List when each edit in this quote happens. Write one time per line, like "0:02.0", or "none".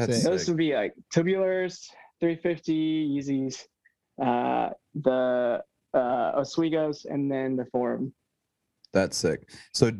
none